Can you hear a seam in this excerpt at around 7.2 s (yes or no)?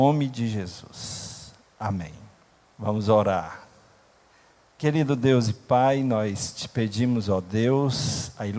no